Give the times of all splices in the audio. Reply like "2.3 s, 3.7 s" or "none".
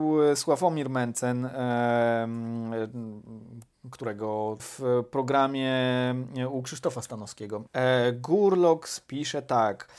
4.6 s, 7.7 s